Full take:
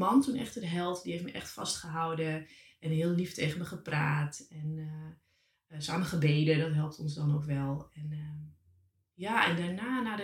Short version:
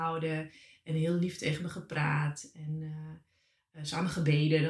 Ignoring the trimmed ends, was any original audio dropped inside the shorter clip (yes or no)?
no